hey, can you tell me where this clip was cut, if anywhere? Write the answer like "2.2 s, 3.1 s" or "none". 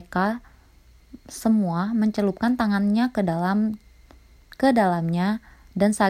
none